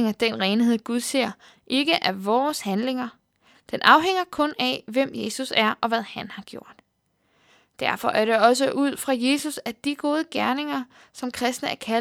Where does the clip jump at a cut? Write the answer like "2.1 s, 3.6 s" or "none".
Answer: 3.5 s